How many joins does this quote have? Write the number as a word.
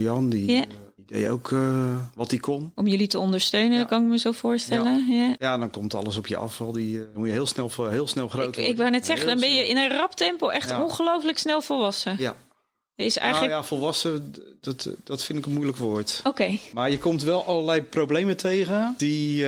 zero